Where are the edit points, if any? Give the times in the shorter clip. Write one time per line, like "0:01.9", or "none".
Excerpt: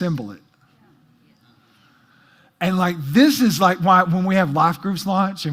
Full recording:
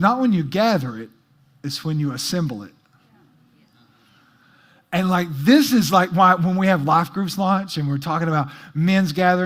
none